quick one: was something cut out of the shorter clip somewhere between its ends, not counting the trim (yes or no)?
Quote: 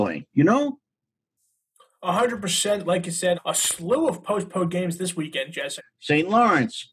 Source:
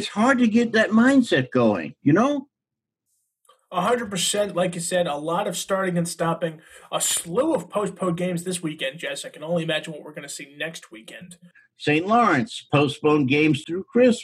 yes